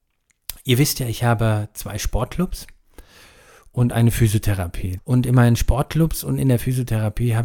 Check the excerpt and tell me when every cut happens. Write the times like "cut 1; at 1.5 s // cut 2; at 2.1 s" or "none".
cut 1; at 5.0 s

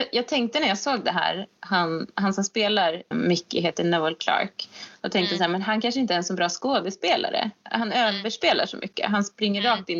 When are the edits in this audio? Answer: cut 1; at 3.1 s

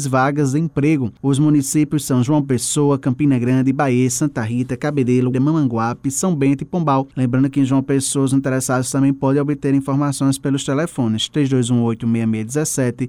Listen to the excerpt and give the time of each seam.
cut 1; at 5.3 s // cut 2; at 7.1 s

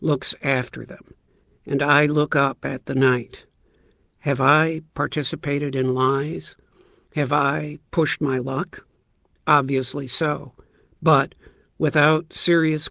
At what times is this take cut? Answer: none

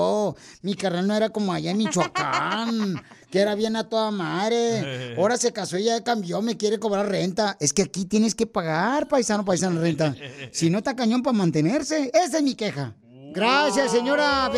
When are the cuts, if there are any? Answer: none

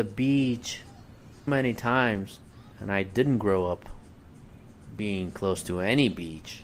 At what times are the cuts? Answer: cut 1; at 1.5 s // cut 2; at 2.7 s

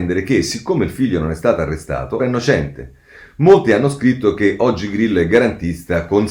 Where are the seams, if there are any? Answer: cut 1; at 2.2 s

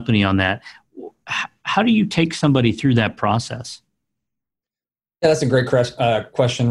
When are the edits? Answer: none

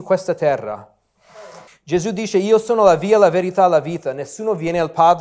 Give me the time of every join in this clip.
cut 1; at 1.7 s

